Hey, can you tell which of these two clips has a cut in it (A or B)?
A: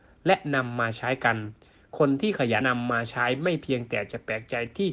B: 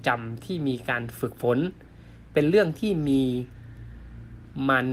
A